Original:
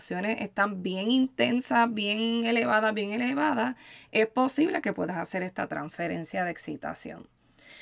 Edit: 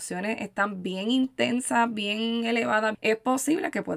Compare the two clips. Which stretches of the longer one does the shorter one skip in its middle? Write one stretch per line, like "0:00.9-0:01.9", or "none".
0:02.9-0:04.1